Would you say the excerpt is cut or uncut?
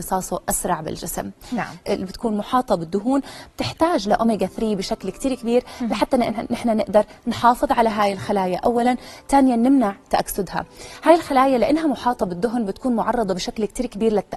cut